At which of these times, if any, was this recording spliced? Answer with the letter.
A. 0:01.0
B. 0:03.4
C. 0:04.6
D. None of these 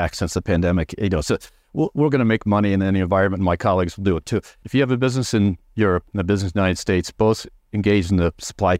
C